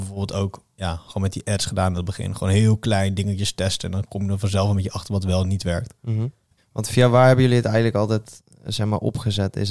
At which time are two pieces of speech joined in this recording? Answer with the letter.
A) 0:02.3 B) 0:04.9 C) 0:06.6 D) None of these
C